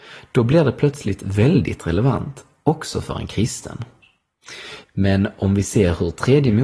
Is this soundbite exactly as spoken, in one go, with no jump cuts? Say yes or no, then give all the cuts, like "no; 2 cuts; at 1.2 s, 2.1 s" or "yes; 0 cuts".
no; 1 cut; at 4.8 s